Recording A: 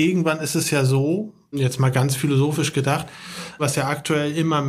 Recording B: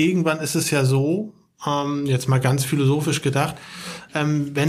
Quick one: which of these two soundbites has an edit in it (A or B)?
A